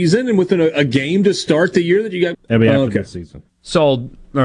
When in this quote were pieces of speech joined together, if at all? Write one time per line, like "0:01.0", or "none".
0:02.3
0:03.5